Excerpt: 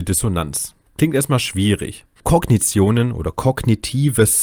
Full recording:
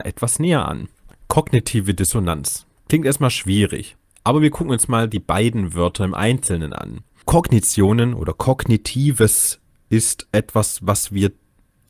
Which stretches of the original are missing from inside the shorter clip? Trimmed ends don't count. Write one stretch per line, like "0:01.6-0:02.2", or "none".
0:04.1-0:07.2